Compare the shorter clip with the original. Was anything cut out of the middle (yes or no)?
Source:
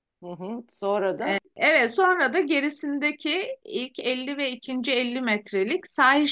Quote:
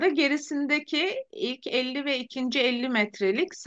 no